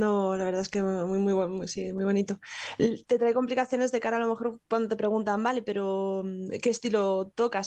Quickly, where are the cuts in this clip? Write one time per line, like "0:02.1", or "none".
none

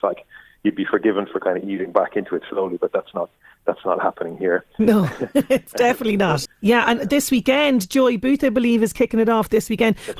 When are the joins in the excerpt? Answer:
0:06.5

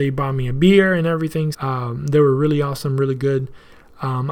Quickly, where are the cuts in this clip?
0:01.5

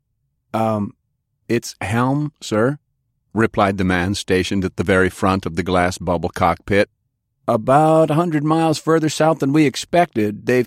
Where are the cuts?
0:07.3

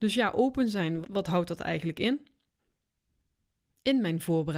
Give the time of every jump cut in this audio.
0:01.0

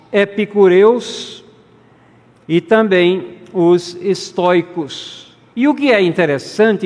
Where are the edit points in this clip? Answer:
0:05.5

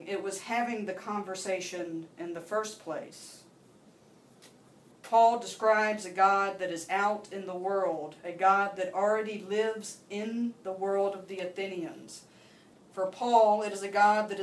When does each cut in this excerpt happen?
0:04.9
0:12.7

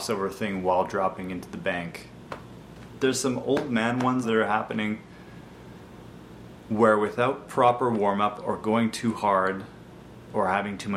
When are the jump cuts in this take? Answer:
0:03.0
0:04.2

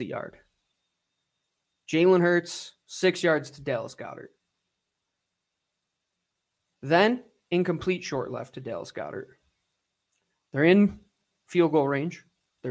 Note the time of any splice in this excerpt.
0:02.8

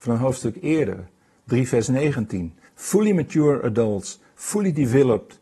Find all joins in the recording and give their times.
0:02.7

